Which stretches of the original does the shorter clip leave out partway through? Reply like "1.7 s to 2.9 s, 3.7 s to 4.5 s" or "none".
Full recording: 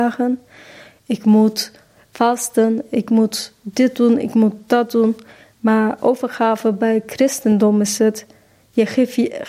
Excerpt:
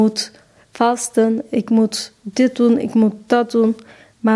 none